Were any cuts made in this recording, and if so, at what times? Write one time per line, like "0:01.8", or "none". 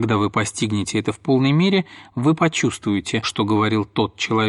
0:03.2